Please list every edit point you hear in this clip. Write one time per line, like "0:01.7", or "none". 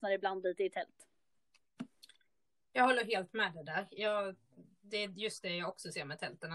none